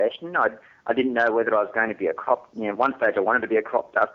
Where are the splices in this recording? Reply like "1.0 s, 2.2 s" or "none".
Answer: none